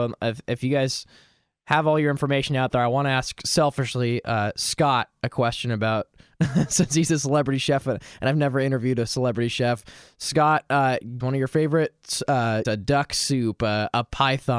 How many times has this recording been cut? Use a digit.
2